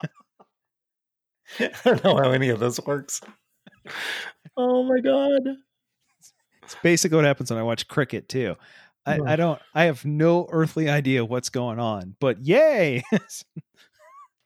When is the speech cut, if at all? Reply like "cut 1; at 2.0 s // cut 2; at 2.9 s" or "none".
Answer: none